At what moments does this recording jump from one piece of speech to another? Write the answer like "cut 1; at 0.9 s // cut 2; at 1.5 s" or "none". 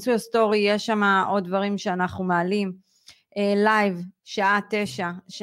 cut 1; at 4.2 s